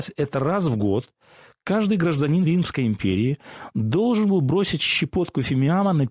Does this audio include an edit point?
no; 0 cuts

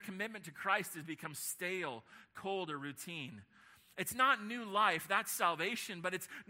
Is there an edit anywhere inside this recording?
no; 0 cuts

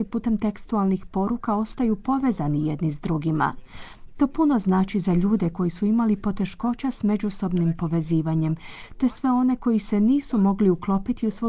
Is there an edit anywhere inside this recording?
no; 0 cuts

